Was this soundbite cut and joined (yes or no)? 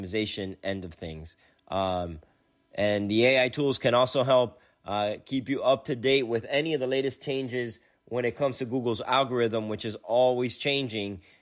no